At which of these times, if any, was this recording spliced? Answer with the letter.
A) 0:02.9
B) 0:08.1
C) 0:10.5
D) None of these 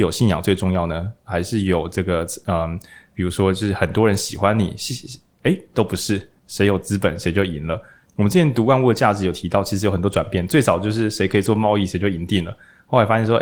B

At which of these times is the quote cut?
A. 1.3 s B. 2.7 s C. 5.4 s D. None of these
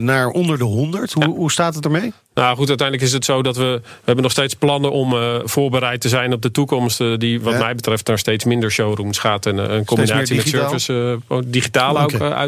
C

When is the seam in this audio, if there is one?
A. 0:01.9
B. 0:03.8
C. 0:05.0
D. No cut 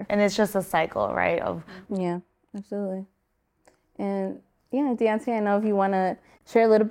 A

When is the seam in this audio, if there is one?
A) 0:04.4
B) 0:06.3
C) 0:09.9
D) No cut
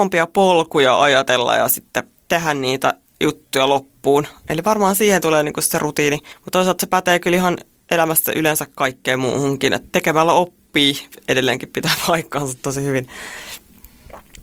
C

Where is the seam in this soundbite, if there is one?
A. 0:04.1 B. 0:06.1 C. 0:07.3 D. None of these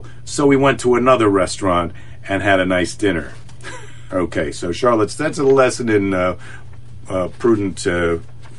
A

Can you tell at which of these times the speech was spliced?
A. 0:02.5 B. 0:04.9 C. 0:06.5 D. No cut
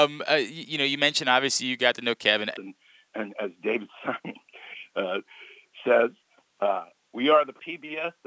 A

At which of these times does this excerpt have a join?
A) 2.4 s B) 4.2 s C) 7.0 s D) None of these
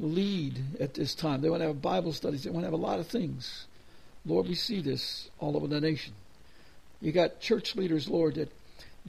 C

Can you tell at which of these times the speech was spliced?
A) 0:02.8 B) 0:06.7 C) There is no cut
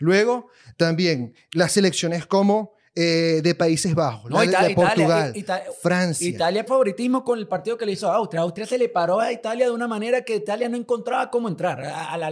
B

